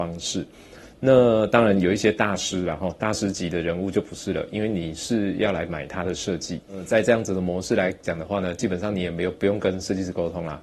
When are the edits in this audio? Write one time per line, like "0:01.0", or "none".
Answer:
none